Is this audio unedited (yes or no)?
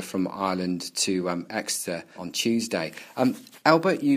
no